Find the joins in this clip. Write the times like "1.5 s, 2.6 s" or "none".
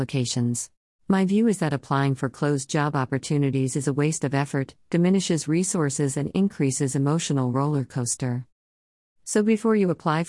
1.0 s

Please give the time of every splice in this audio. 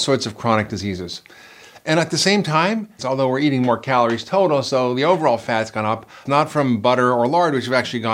3.0 s, 6.3 s

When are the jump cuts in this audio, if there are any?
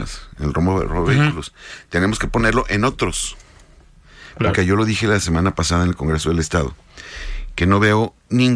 4.5 s

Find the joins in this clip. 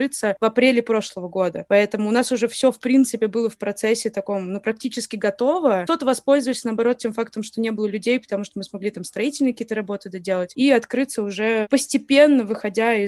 none

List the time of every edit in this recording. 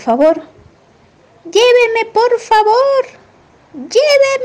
none

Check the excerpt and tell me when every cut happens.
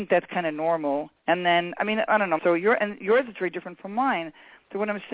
2.4 s

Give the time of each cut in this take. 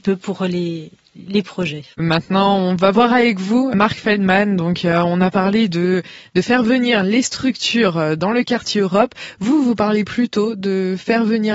1.9 s

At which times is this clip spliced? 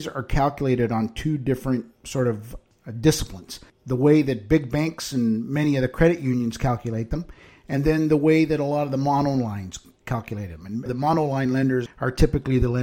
10.9 s, 11.9 s

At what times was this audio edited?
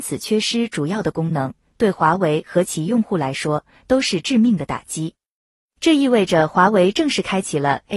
none

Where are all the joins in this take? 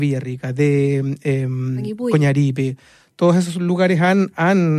none

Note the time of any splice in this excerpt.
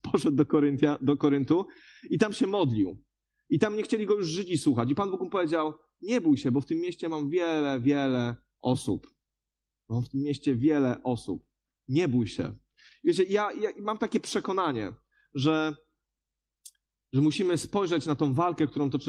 none

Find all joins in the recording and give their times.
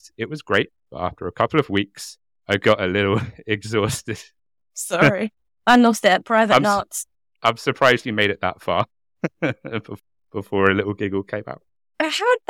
none

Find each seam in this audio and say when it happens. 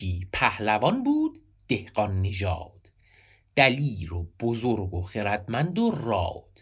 none

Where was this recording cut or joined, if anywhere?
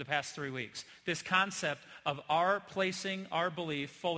none

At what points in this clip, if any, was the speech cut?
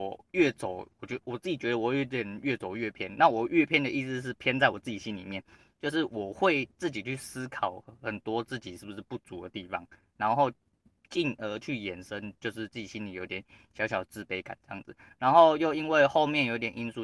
13.3 s

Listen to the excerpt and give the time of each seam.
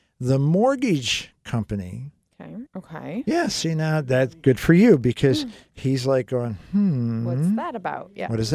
2.7 s

